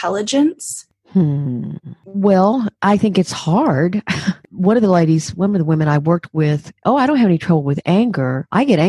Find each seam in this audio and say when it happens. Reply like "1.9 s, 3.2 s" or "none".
6.8 s